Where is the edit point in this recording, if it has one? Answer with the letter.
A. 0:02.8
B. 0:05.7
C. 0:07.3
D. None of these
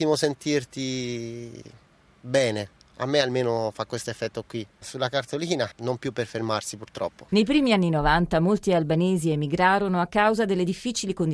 B